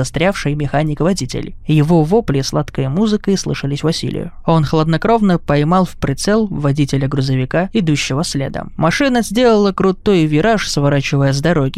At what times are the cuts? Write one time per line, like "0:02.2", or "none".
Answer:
0:08.8